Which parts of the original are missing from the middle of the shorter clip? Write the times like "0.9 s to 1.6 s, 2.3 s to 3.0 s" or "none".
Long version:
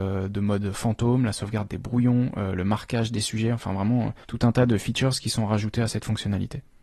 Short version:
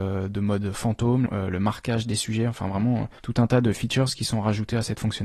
1.3 s to 2.3 s